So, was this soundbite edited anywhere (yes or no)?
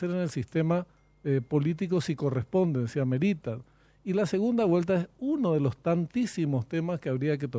no